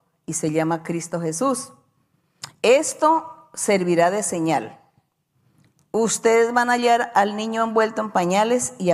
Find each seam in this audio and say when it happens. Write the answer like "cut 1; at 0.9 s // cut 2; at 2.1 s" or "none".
none